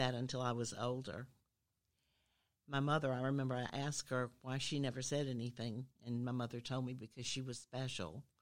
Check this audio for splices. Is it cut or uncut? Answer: uncut